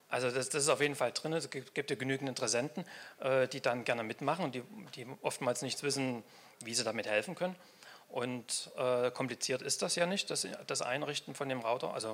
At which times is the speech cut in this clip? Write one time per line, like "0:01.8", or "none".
none